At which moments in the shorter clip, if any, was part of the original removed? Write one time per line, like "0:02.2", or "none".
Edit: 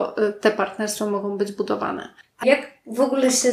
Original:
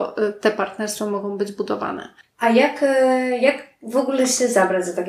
0:02.4